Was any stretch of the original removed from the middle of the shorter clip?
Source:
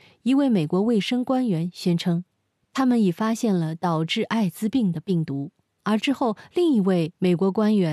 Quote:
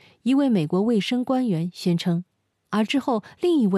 yes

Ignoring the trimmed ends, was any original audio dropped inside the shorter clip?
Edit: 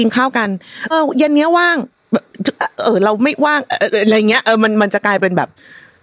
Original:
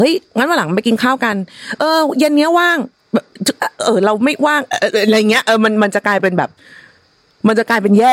yes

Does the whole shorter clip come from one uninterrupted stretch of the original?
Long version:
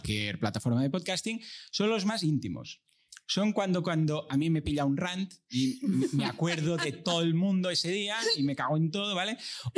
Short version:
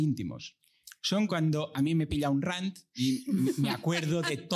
no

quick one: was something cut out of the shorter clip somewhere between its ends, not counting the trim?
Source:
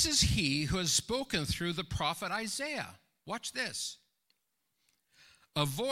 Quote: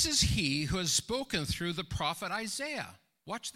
no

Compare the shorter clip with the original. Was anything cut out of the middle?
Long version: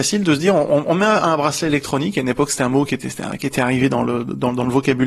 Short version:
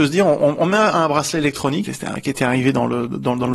yes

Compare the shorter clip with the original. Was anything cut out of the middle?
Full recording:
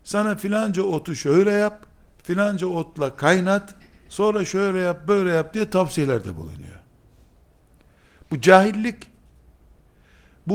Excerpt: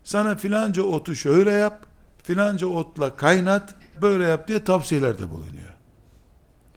yes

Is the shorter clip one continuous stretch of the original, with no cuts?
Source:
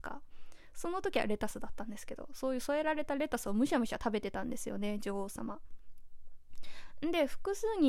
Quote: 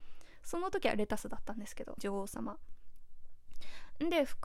no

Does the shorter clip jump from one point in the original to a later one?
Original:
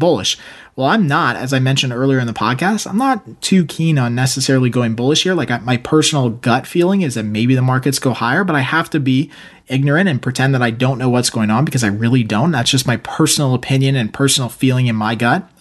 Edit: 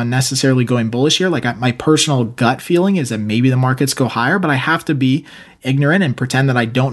no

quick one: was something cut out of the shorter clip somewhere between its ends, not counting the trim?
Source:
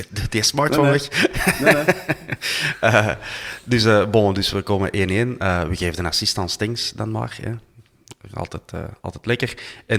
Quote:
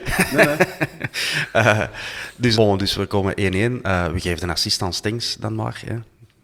yes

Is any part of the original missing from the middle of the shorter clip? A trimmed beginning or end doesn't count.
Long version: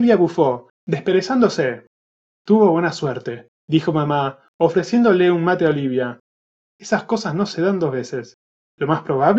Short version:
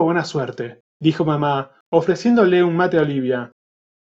no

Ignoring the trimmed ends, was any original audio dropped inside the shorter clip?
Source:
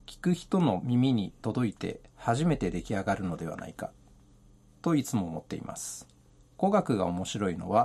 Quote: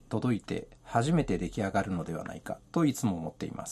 yes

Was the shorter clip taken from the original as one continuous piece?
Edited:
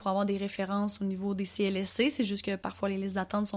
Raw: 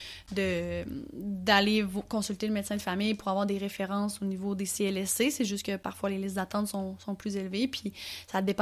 yes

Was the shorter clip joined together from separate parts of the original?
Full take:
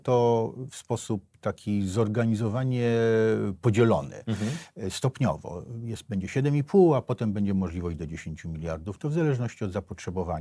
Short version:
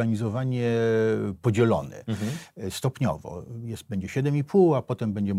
no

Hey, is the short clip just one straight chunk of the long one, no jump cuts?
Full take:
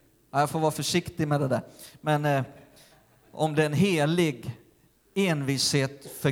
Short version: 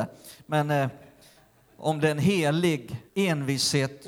no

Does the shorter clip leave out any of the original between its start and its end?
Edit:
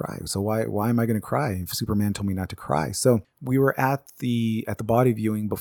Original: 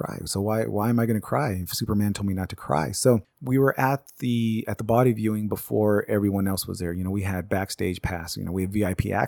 no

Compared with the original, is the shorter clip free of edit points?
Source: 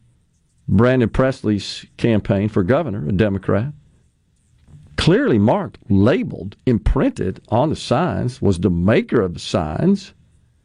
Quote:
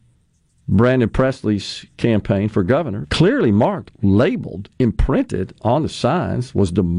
no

